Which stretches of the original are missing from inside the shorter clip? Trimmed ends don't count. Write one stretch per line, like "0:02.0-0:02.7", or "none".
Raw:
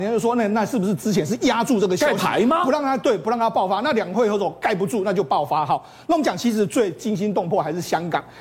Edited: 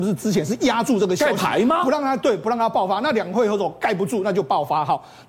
none